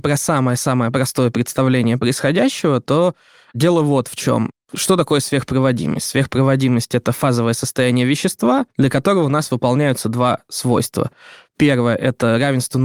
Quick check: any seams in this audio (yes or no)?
yes